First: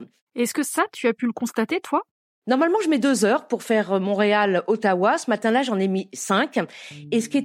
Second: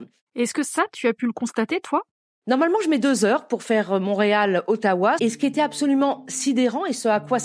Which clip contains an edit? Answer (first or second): second